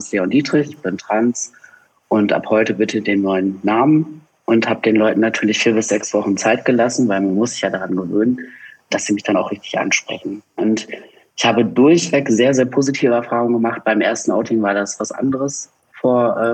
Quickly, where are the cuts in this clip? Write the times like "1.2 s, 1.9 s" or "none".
none